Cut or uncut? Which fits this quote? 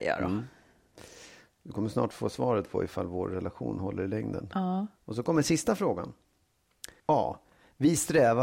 cut